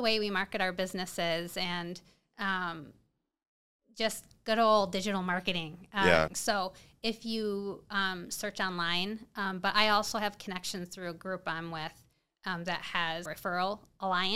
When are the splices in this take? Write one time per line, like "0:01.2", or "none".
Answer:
0:06.3
0:13.3